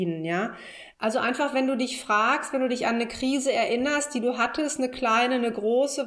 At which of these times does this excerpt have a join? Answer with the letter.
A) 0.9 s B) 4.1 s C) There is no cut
A